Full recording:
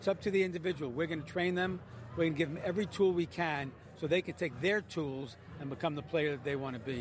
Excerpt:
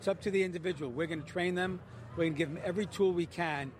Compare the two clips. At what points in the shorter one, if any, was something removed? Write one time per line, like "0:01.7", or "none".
none